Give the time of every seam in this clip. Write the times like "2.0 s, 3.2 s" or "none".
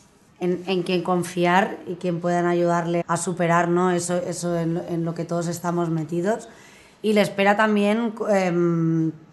3.0 s